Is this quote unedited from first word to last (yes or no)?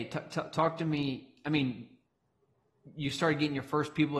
yes